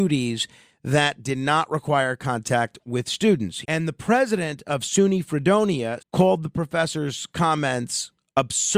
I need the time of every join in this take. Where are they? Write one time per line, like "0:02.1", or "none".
0:03.6
0:06.0